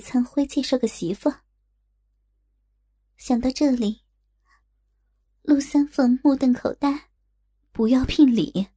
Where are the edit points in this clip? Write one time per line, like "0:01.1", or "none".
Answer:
0:04.6
0:07.2